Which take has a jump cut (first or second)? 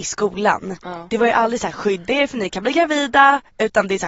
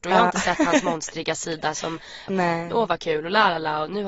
second